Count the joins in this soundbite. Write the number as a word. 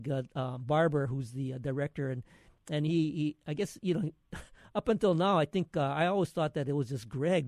zero